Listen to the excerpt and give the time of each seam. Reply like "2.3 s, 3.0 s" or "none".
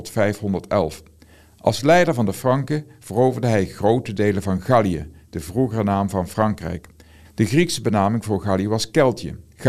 7.2 s